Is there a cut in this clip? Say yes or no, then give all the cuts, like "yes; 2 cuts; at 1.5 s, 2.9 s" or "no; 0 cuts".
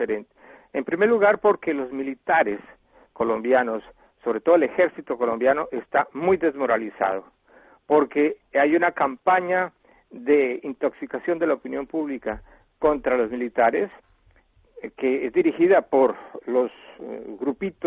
no; 0 cuts